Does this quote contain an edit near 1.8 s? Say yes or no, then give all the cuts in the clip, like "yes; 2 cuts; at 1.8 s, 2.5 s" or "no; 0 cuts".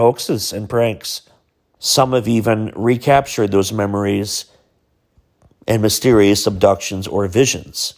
yes; 1 cut; at 1.8 s